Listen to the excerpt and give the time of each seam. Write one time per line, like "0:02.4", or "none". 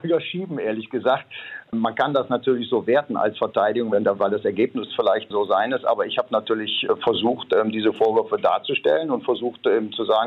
0:03.9